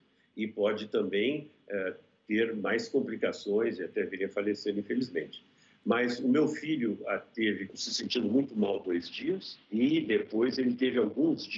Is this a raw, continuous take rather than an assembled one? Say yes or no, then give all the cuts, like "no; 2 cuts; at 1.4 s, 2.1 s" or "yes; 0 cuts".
no; 2 cuts; at 7.7 s, 9.6 s